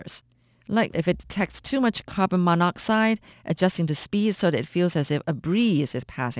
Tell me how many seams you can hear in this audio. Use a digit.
2